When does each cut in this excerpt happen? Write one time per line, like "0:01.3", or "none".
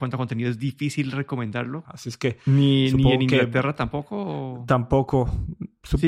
0:01.8